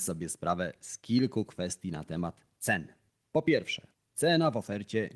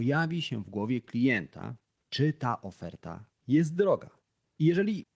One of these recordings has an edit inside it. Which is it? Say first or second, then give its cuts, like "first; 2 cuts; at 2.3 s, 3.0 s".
second; 1 cut; at 2.0 s